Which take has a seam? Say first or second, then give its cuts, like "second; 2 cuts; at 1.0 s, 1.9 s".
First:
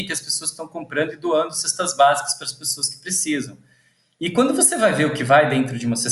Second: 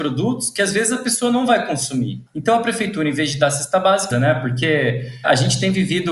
second; 2 cuts; at 2.3 s, 4.1 s